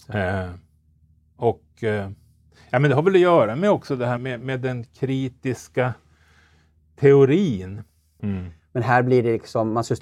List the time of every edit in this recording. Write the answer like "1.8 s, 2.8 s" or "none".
4.2 s, 8.2 s